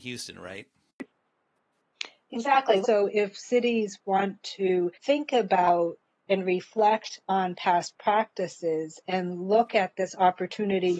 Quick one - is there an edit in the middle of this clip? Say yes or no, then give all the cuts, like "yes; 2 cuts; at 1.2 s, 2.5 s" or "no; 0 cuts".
yes; 2 cuts; at 2.8 s, 4.9 s